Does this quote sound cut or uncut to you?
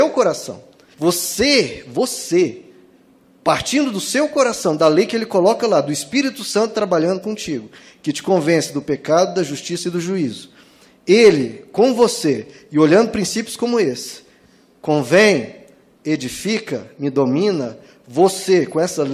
cut